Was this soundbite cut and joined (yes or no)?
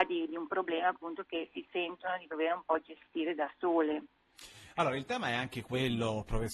no